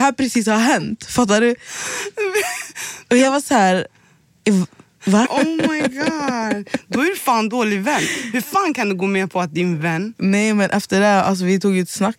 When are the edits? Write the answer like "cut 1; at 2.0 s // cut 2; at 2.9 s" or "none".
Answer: cut 1; at 5.3 s

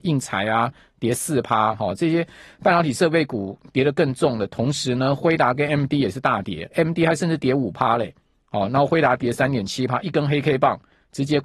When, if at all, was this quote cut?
none

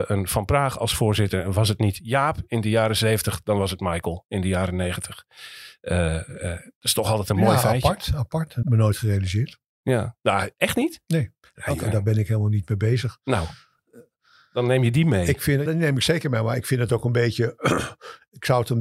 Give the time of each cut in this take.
cut 1; at 8.6 s // cut 2; at 15.7 s

